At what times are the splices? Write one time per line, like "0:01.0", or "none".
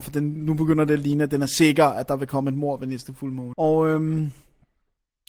0:03.5